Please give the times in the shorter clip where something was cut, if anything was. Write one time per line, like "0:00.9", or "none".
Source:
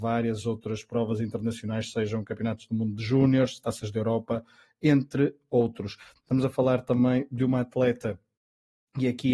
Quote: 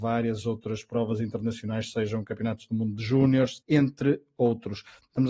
0:03.6

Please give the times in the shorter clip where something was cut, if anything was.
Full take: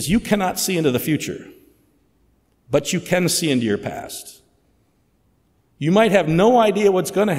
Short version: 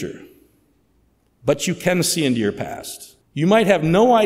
0:03.2

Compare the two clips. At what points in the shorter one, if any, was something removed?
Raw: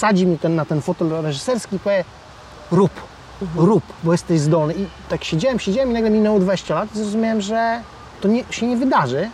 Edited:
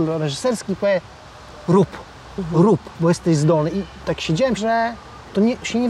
0:04.6

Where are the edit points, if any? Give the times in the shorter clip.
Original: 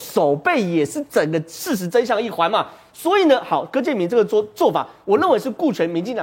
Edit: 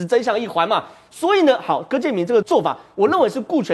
0:02.4

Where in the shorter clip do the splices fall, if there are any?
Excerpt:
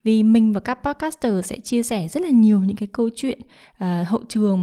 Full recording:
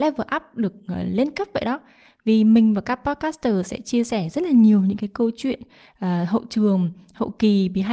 none

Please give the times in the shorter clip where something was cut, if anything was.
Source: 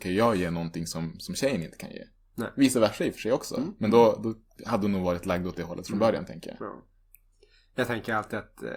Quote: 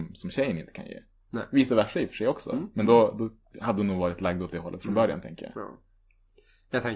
none

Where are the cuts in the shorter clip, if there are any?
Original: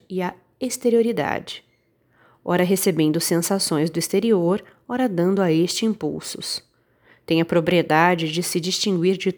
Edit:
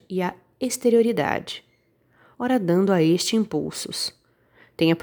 0:02.3

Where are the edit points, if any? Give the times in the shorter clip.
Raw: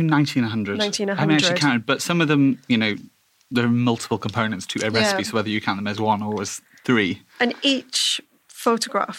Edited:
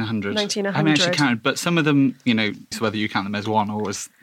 0:02.7

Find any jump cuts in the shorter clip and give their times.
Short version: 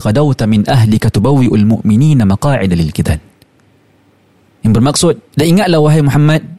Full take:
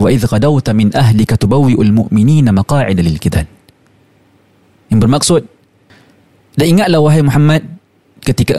0:05.3

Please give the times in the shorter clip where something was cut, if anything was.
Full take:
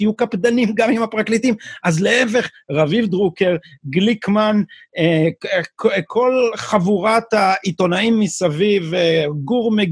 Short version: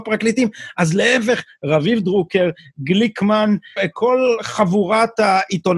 0:03.8

